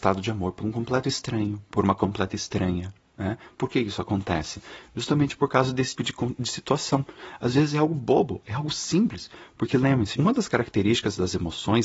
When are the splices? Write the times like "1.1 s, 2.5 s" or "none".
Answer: 6.0 s, 10.1 s